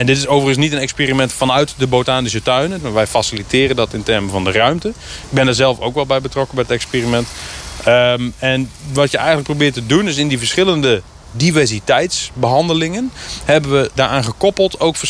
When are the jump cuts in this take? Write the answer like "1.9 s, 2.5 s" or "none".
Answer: 2.8 s